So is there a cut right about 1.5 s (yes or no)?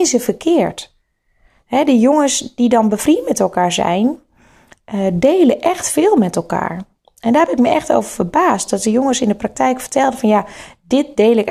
no